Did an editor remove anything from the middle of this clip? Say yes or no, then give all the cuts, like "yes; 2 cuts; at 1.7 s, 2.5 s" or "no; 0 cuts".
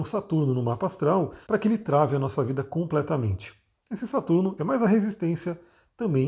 yes; 2 cuts; at 1.4 s, 4.6 s